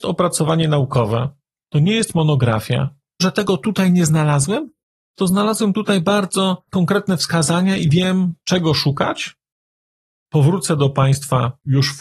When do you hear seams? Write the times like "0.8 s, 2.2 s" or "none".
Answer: 3.2 s, 10.1 s